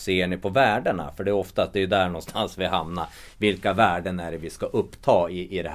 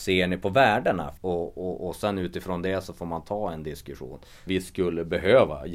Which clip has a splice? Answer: second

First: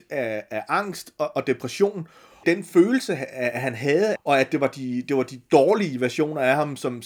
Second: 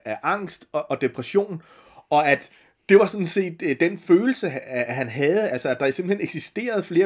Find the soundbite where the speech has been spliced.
first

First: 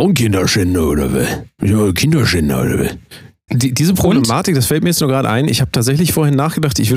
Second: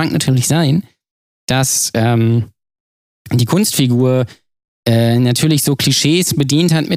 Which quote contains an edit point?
first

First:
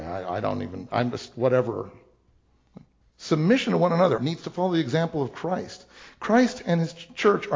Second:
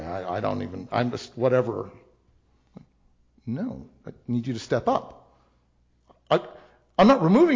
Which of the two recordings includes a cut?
first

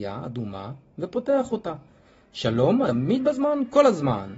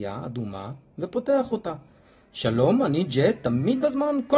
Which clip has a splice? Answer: first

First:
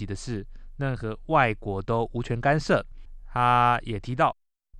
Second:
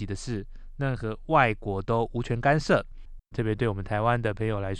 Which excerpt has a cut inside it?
second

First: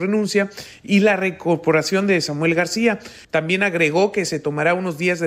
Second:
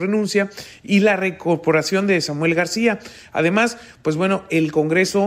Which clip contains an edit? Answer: first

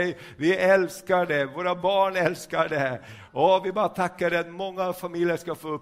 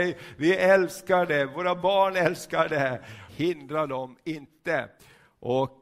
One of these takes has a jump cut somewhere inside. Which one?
second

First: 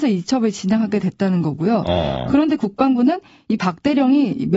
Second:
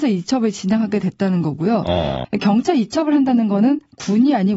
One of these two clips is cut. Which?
second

